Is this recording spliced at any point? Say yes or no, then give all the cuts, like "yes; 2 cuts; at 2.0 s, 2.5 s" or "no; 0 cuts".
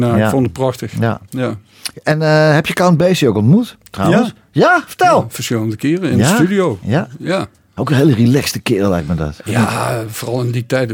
no; 0 cuts